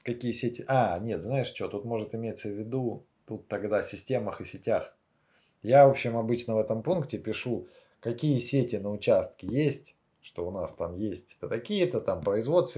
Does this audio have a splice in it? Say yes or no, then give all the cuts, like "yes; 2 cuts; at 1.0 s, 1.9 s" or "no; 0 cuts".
yes; 1 cut; at 11.4 s